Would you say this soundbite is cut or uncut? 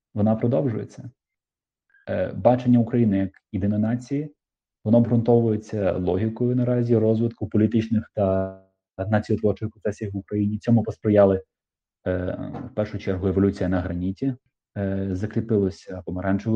uncut